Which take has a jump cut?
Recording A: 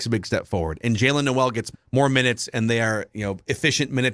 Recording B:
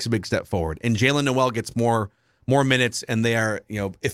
A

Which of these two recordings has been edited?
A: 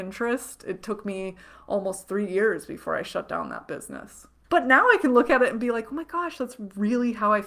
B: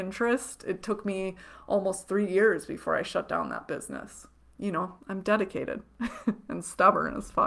A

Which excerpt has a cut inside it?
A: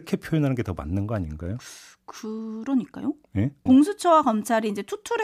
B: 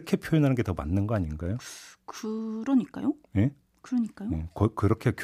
A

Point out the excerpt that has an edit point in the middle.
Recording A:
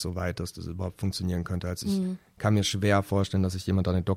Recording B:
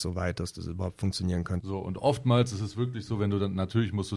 B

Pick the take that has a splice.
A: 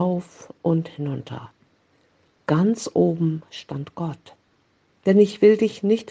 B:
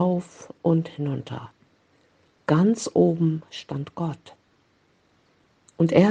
A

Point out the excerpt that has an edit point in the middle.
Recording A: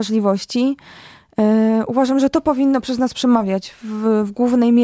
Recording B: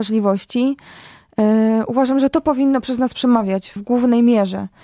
B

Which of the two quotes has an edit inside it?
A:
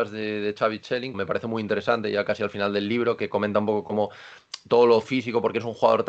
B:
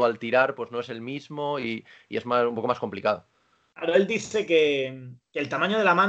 A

